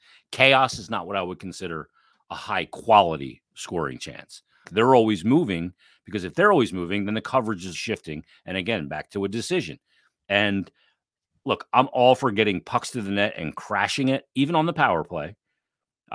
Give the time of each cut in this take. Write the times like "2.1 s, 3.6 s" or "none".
4.6 s, 7.7 s, 10.2 s